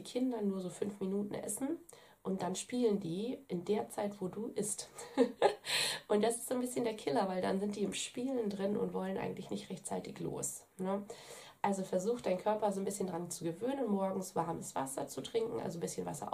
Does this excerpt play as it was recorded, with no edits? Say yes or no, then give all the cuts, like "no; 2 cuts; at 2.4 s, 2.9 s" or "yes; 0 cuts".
yes; 0 cuts